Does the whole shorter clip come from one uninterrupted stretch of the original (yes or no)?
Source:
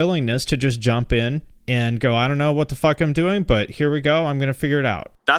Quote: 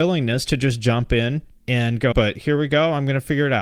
no